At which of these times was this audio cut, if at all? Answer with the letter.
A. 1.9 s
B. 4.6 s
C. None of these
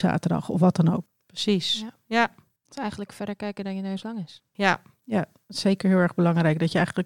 B